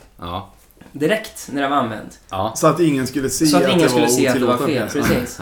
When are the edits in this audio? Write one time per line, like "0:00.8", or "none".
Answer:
none